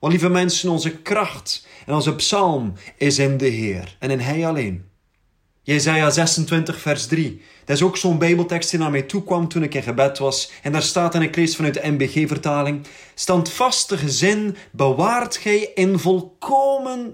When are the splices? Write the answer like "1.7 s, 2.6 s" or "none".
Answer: none

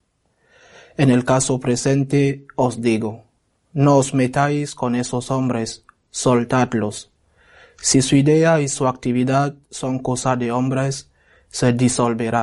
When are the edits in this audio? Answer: none

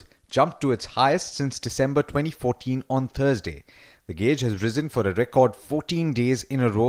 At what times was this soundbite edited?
none

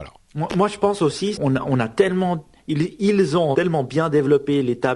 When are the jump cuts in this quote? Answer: 1.4 s, 3.5 s

